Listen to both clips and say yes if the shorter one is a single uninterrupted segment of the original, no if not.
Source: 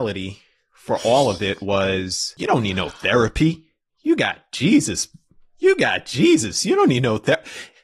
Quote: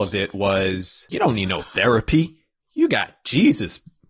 yes